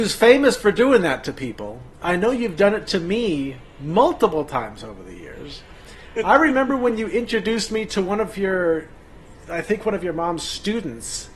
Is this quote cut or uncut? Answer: uncut